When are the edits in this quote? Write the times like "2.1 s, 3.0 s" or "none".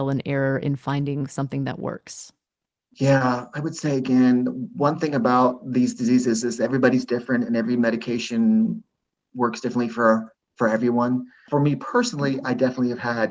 none

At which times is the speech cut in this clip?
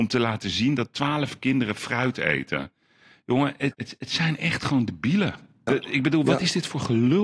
3.7 s, 5.7 s

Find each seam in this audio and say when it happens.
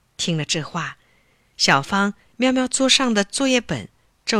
none

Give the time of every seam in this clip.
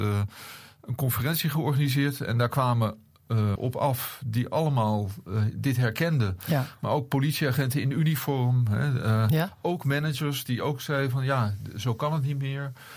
3.6 s

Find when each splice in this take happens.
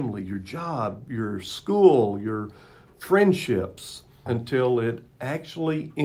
4.3 s

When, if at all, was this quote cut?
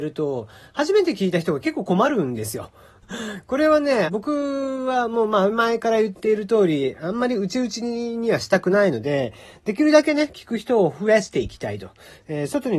3.0 s, 4.1 s

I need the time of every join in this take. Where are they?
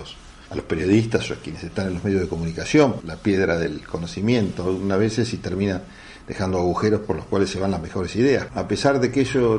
3.0 s, 8.5 s

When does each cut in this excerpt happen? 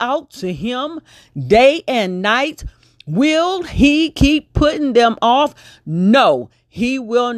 none

